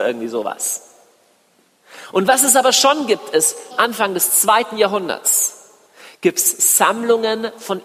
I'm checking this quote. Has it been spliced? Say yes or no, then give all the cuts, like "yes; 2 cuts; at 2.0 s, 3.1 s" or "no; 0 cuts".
yes; 1 cut; at 3.7 s